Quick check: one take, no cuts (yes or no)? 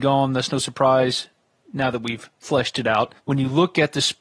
no